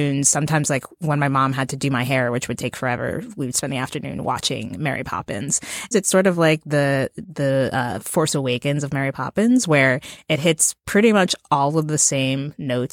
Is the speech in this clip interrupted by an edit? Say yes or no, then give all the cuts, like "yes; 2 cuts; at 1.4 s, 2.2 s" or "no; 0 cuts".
yes; 1 cut; at 5.9 s